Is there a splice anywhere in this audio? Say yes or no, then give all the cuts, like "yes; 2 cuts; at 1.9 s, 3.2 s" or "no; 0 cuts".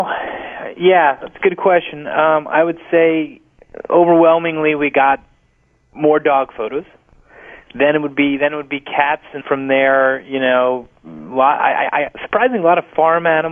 yes; 1 cut; at 9.4 s